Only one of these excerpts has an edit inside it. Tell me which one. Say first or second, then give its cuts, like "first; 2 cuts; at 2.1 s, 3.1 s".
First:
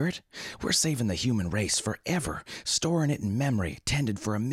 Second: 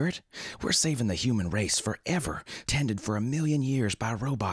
second; 1 cut; at 2.6 s